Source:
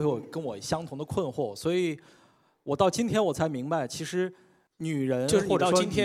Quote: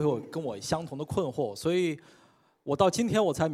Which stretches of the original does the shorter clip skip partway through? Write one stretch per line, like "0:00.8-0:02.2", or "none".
none